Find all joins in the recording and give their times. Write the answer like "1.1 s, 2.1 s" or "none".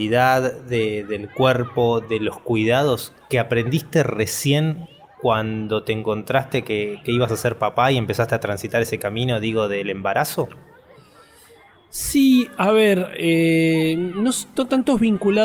none